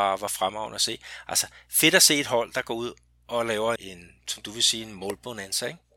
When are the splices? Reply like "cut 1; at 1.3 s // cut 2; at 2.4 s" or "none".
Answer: cut 1; at 3.8 s